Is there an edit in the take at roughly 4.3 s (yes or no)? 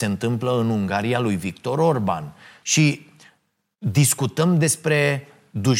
no